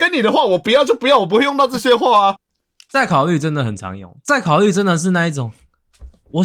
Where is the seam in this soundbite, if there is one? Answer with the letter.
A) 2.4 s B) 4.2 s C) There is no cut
A